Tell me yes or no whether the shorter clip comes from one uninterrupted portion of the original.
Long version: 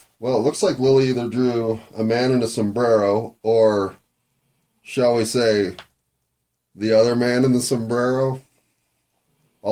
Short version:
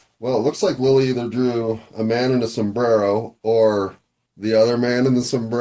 no